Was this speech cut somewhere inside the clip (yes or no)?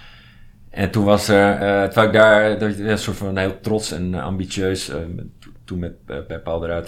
no